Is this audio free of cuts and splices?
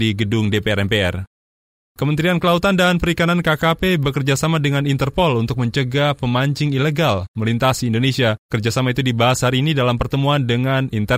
yes; 0 cuts

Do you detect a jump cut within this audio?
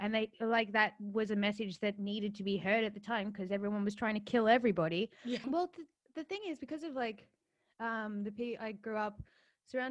yes; 1 cut; at 5.4 s

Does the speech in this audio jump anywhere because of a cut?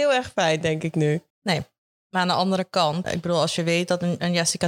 yes; 2 cuts; at 1.3 s, 3.0 s

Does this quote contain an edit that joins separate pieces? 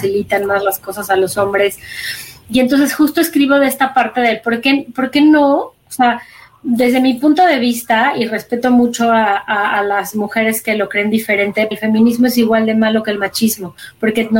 yes; 1 cut; at 11.7 s

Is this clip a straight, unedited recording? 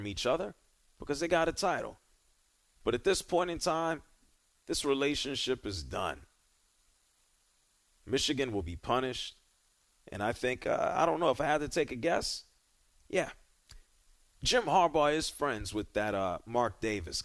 no; 1 cut; at 10.0 s

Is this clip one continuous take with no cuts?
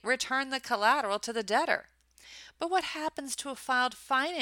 yes; 0 cuts

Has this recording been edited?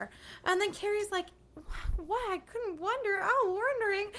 no; 0 cuts

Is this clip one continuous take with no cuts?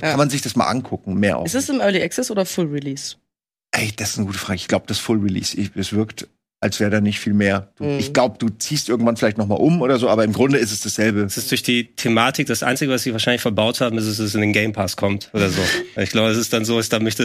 yes; 0 cuts

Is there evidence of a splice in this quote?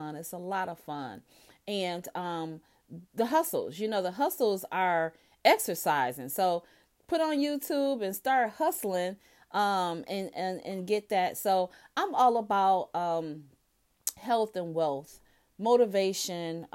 no; 0 cuts

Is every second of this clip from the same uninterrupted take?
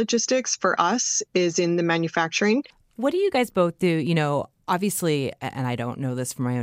yes; 0 cuts

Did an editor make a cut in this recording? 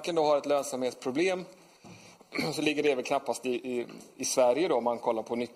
no; 0 cuts

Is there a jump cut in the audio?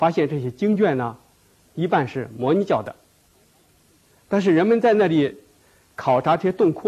yes; 1 cut; at 1.7 s

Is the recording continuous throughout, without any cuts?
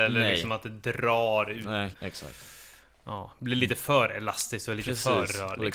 no; 1 cut; at 1.9 s

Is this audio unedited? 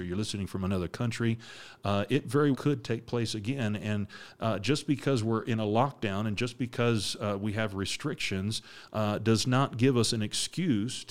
no; 1 cut; at 2.5 s

